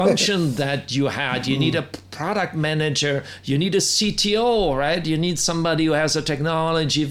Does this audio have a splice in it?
no; 0 cuts

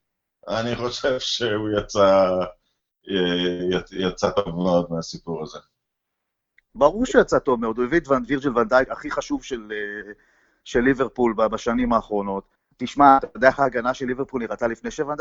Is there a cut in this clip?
yes; 2 cuts; at 8.9 s, 12.5 s

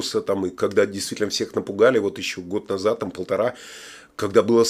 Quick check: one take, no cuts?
yes; 0 cuts

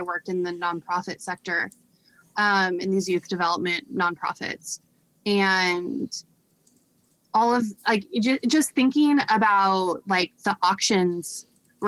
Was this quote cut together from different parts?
no; 0 cuts

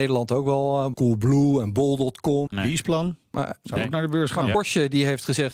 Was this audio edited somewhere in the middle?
yes; 2 cuts; at 0.9 s, 2.5 s

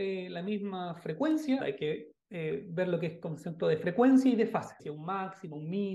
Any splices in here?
yes; 2 cuts; at 1.6 s, 4.8 s

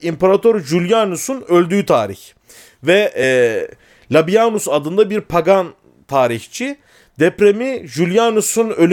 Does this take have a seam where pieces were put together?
no; 0 cuts

